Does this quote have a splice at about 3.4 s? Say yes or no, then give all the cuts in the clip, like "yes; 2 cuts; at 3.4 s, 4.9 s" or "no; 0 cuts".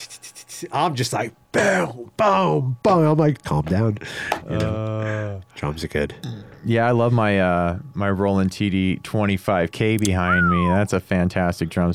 yes; 1 cut; at 3.4 s